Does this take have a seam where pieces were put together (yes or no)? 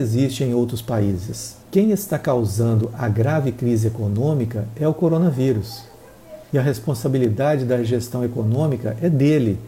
yes